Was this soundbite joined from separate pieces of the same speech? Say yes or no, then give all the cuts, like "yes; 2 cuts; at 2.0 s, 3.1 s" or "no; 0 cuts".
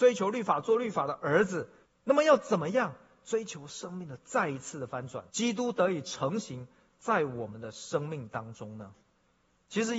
yes; 2 cuts; at 1.8 s, 5.3 s